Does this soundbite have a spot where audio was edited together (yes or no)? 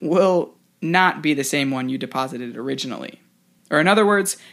no